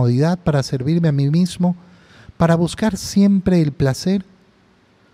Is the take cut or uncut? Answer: uncut